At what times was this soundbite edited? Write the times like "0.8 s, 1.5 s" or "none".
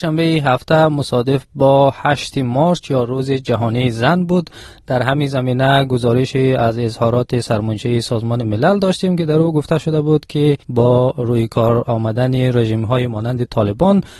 10.6 s